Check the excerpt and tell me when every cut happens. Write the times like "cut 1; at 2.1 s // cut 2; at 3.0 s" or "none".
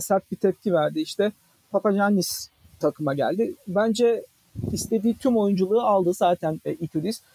none